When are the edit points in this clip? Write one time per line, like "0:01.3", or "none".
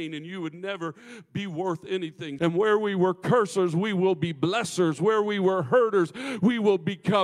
0:02.4